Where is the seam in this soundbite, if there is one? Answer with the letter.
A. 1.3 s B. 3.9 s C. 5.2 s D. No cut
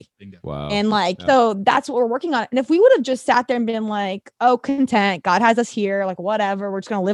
A